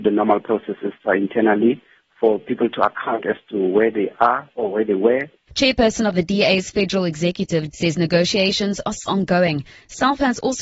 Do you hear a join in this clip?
yes; 3 cuts; at 5.5 s, 7.7 s, 9.1 s

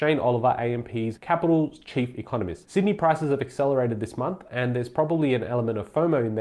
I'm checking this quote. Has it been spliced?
no; 0 cuts

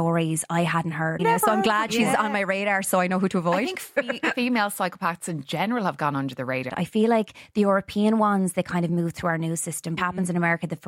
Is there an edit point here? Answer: yes; 3 cuts; at 1.2 s, 6.7 s, 10.0 s

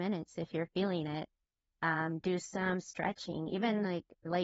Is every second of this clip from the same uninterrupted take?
yes; 0 cuts

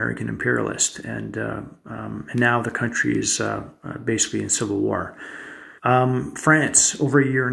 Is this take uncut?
no; 1 cut; at 5.8 s

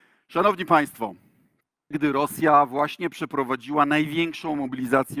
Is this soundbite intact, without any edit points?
no; 1 cut; at 1.9 s

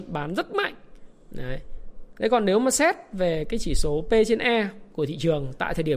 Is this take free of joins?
no; 1 cut; at 2.2 s

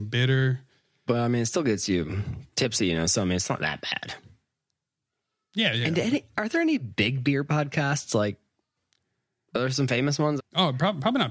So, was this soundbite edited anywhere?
yes; 1 cut; at 10.4 s

